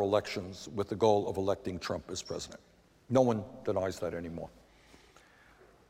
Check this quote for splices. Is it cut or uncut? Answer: uncut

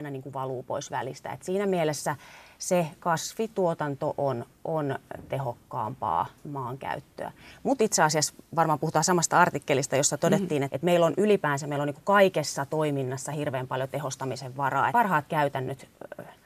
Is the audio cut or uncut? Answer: cut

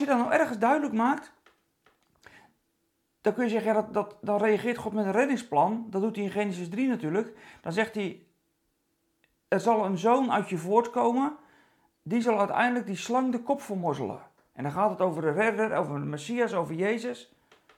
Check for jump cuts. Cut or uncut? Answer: uncut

